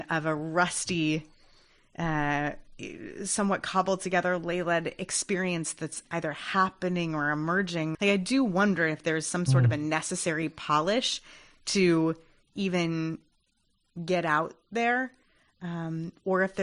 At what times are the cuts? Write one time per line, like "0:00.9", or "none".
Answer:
0:07.9